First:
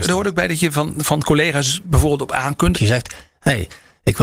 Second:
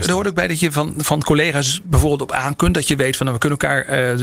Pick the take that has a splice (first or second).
first